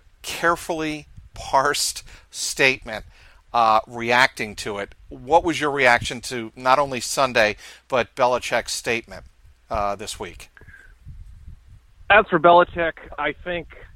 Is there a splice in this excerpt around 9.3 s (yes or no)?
no